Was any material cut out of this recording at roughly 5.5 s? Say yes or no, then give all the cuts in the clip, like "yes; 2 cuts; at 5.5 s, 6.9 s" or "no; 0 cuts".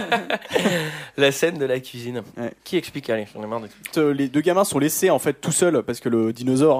no; 2 cuts; at 2.6 s, 3.9 s